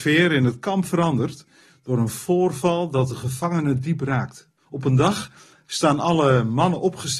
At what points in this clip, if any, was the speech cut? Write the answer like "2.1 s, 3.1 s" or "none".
4.6 s